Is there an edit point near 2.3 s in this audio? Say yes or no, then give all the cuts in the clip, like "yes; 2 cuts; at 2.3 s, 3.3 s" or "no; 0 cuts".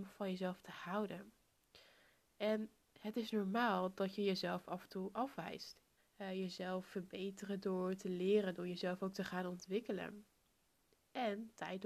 no; 1 cut; at 6.0 s